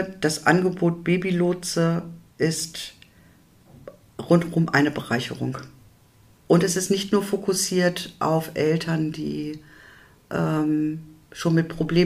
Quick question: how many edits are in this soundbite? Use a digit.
1